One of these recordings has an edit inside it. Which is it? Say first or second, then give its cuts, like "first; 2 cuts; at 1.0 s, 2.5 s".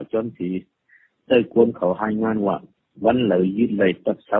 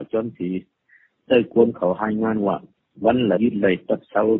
second; 1 cut; at 3.4 s